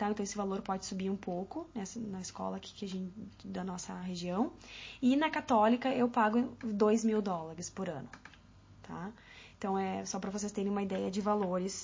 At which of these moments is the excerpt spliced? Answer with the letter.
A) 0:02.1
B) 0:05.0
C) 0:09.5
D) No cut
D